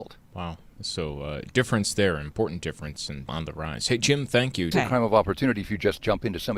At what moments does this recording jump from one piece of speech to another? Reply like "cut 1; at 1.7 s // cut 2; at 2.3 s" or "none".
cut 1; at 3.3 s // cut 2; at 4.7 s